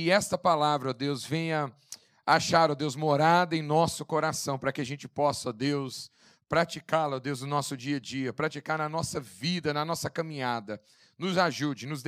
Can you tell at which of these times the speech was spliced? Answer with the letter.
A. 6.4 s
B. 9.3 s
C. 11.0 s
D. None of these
D